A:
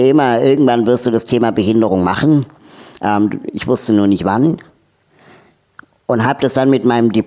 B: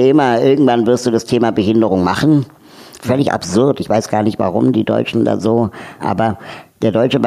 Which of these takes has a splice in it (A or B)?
B